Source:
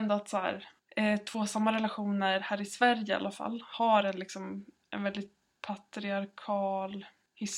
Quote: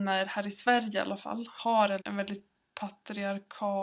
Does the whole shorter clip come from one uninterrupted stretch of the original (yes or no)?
no